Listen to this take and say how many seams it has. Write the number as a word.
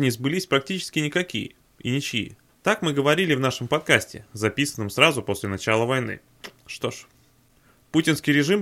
one